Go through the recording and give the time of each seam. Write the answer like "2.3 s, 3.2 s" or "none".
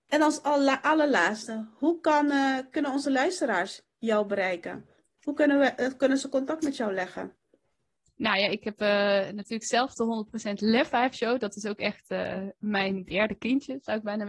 none